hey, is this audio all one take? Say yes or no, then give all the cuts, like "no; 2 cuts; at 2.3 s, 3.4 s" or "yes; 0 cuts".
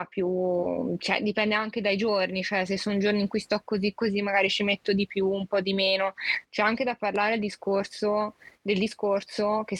yes; 0 cuts